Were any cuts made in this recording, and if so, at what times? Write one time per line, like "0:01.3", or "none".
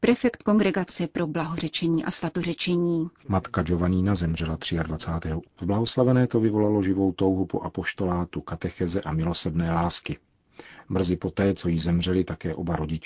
0:03.2
0:05.4